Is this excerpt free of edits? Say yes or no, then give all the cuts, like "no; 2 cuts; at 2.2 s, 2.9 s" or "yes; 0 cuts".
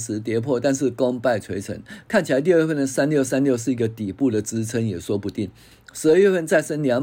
no; 1 cut; at 5.7 s